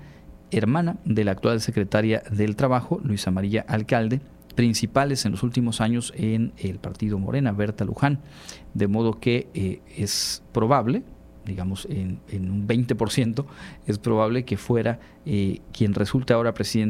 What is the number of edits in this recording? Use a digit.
1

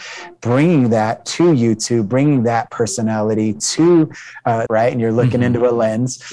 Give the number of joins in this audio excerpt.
1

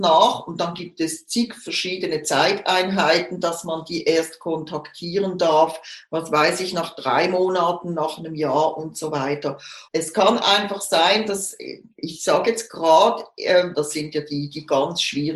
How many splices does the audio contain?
2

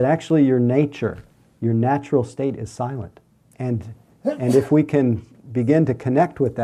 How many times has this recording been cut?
1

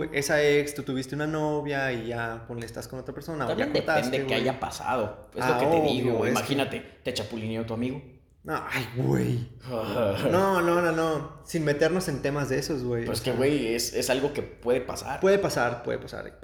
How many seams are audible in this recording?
0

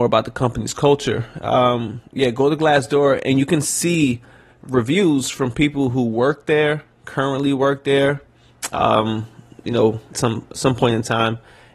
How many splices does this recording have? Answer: 1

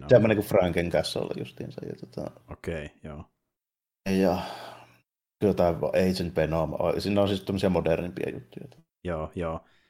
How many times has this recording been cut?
0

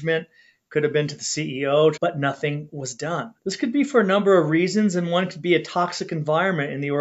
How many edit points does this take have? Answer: 2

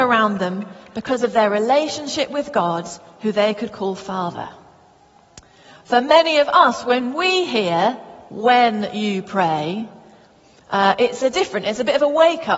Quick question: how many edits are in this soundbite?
0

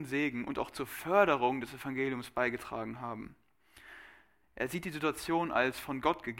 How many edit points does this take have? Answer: 1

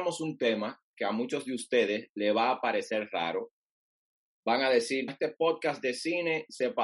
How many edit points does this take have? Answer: 1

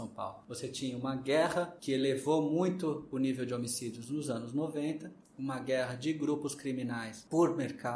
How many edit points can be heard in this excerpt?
0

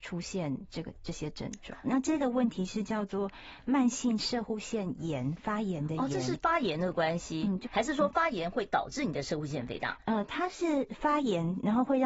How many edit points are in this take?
2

